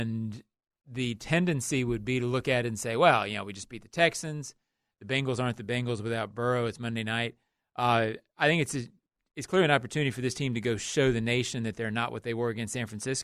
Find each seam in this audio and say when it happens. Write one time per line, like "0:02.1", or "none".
none